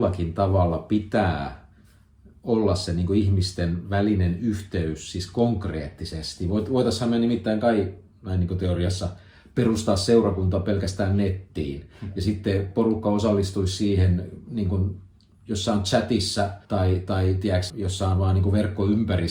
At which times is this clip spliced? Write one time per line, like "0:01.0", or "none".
0:16.6
0:17.7